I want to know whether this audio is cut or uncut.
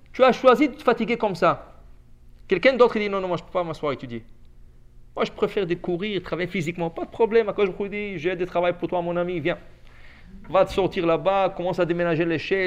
uncut